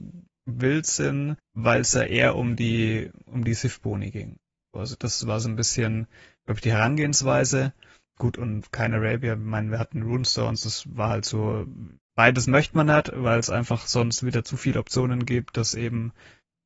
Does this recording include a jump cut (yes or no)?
no